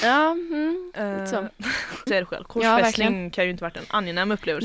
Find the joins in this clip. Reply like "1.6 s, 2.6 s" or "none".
2.1 s